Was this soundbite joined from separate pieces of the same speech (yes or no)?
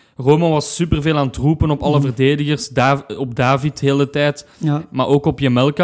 no